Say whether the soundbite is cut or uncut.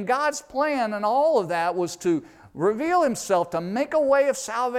uncut